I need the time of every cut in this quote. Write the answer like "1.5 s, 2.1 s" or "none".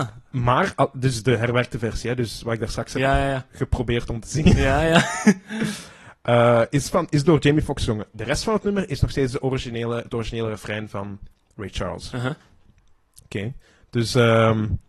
none